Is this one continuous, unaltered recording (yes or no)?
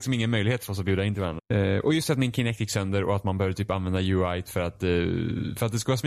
no